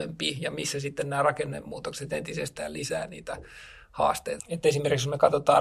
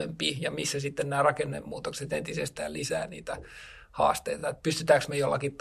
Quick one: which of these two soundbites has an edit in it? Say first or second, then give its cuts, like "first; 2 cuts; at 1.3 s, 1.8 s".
first; 1 cut; at 4.4 s